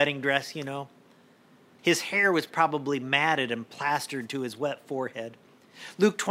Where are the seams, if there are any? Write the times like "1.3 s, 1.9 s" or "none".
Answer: 1.8 s